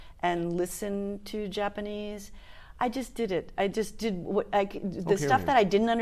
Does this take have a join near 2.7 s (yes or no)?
no